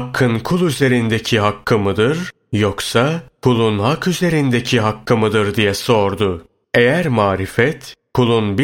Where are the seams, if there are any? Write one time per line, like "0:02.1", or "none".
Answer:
0:06.6